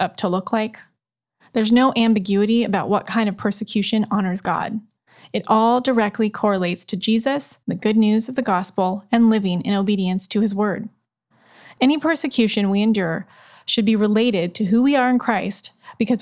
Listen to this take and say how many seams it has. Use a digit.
1